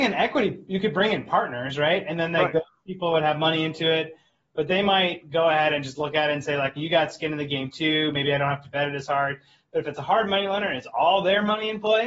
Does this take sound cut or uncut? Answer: cut